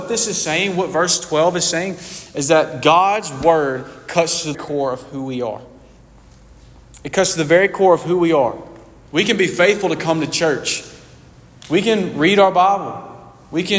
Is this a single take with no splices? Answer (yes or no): no